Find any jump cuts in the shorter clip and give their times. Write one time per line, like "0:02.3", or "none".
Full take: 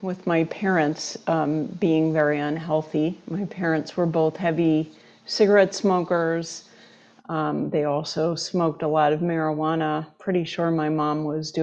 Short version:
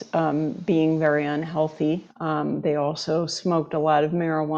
0:02.1